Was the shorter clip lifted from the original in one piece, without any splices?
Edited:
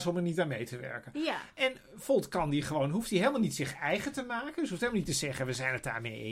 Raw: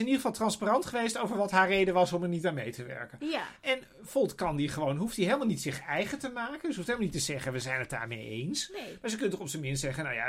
yes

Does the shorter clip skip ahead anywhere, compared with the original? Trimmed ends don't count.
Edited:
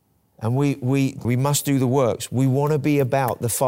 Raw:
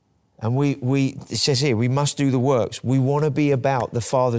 yes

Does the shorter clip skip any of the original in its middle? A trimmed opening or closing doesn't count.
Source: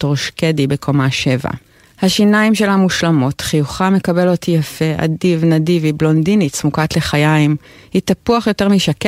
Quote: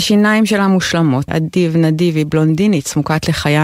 yes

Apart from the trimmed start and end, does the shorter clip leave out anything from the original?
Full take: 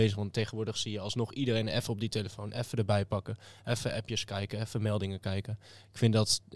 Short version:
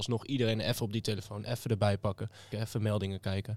yes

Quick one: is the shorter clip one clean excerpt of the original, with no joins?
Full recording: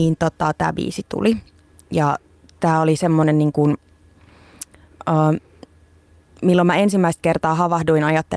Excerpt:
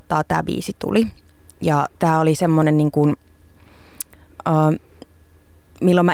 no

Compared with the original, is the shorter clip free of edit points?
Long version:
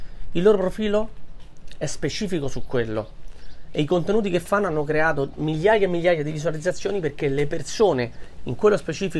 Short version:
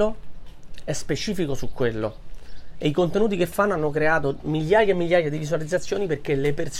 yes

